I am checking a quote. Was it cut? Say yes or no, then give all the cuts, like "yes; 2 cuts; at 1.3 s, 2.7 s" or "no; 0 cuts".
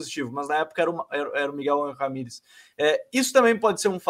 no; 0 cuts